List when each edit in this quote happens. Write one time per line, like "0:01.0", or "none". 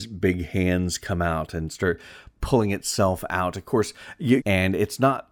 0:04.4

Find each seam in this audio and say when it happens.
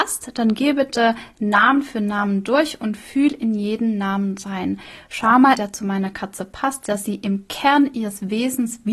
0:05.5

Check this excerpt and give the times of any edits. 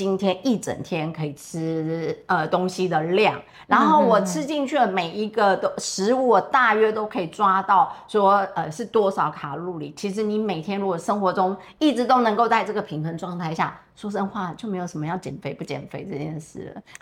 none

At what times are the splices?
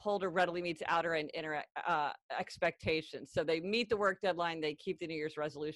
none

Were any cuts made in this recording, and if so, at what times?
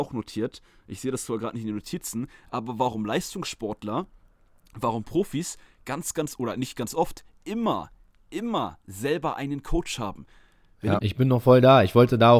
0:11.0

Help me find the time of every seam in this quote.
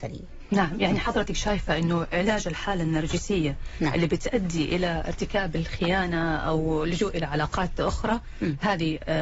none

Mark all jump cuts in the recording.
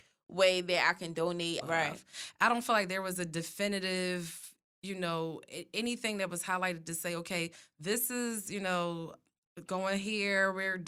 0:01.6

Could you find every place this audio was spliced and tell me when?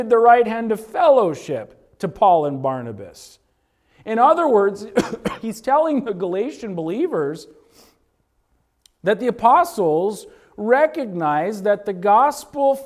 none

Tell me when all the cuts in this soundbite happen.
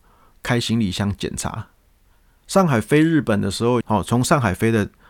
0:02.4
0:03.8

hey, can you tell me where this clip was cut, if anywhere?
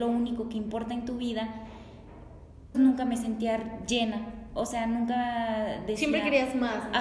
0:02.7

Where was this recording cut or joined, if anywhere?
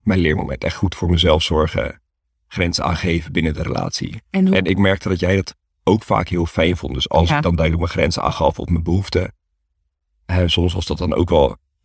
none

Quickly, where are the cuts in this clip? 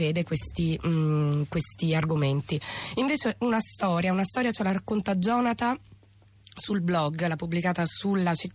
none

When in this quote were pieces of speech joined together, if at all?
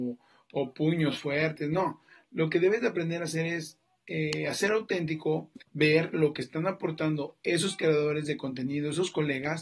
0:05.6

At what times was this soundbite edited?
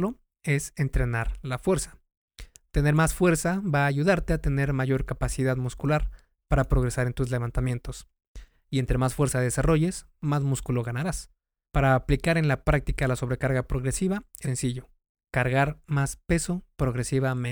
0:11.6
0:14.4

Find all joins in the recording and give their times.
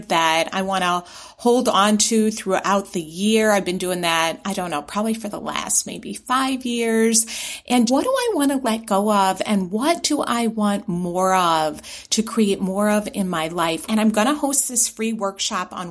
0:07.9
0:13.9

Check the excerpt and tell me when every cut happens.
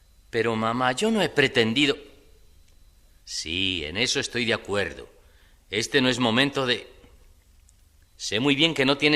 0:03.2
0:08.0

